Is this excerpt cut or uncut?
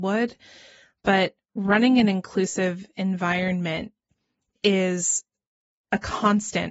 uncut